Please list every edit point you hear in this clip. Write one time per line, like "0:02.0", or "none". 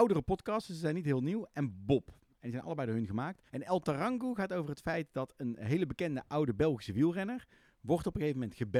0:03.5